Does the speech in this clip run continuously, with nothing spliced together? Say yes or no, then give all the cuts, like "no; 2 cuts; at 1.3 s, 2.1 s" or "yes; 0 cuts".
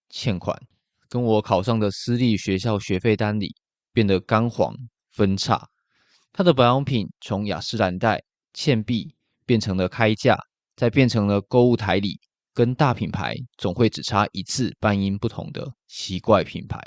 yes; 0 cuts